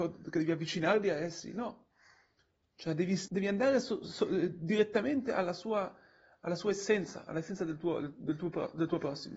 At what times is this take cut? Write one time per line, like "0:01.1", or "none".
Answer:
0:03.3